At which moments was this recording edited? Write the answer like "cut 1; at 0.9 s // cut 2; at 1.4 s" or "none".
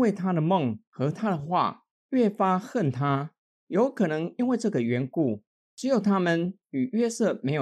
cut 1; at 3.5 s // cut 2; at 5.5 s